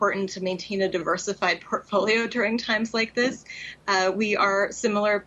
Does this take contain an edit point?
no; 0 cuts

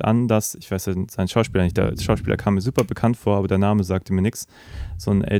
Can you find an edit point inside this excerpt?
no; 0 cuts

